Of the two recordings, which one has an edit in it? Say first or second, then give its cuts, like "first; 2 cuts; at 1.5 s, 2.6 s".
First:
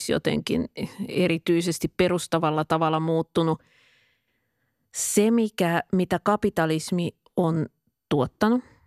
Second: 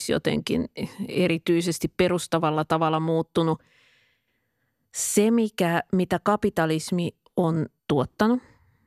second; 1 cut; at 7.8 s